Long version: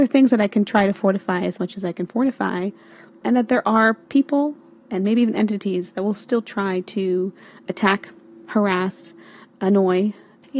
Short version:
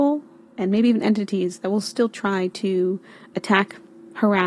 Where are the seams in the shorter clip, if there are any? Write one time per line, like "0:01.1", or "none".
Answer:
none